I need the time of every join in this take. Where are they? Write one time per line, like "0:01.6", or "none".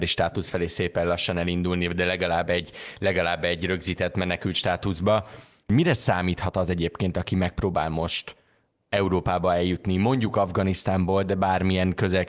none

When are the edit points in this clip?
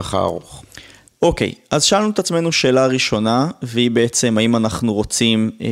0:01.1

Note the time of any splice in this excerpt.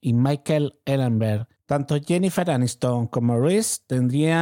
none

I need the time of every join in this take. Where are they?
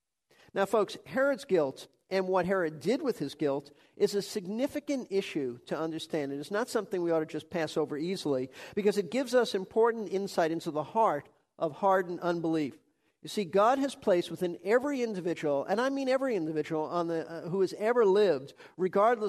none

